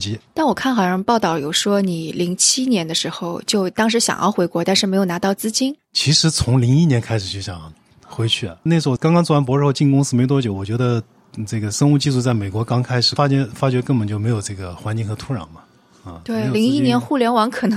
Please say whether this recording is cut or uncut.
cut